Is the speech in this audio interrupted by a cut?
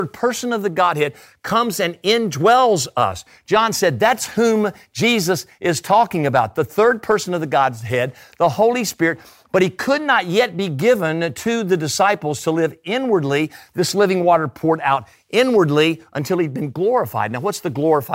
no; 0 cuts

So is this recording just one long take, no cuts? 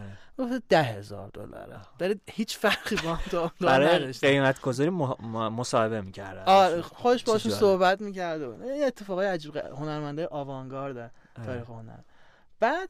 yes; 0 cuts

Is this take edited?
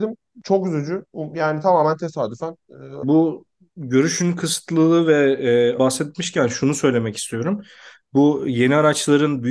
yes; 2 cuts; at 3.0 s, 5.8 s

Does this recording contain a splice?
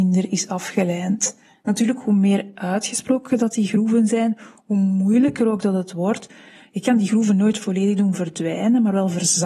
yes; 1 cut; at 1.5 s

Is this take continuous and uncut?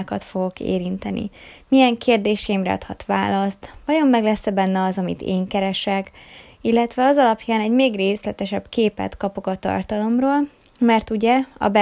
yes; 0 cuts

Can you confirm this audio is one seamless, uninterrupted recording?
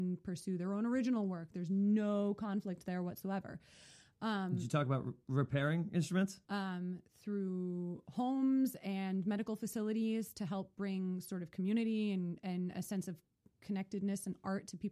no; 1 cut; at 6.4 s

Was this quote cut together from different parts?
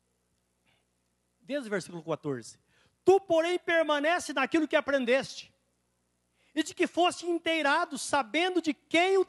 no; 0 cuts

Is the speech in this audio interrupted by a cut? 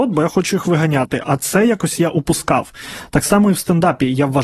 no; 0 cuts

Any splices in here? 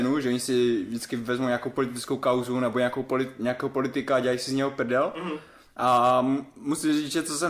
no; 0 cuts

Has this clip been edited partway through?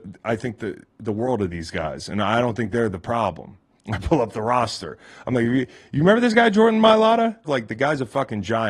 yes; 2 cuts; at 3.7 s, 7.4 s

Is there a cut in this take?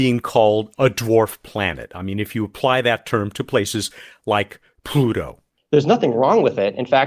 no; 0 cuts

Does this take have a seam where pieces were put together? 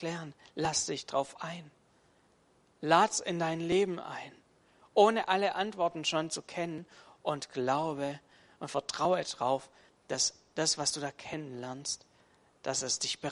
no; 0 cuts

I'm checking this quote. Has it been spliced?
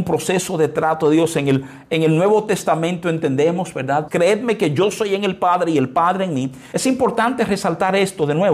yes; 2 cuts; at 4.1 s, 6.7 s

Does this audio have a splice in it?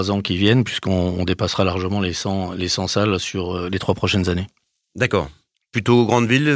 no; 0 cuts

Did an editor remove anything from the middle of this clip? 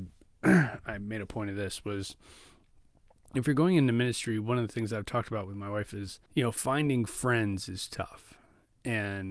yes; 1 cut; at 6.3 s

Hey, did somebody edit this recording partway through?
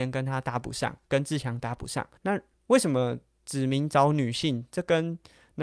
yes; 1 cut; at 2.2 s

